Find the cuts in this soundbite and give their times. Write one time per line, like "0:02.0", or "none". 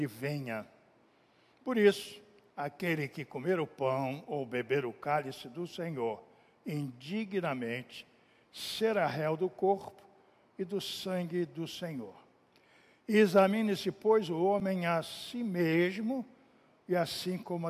none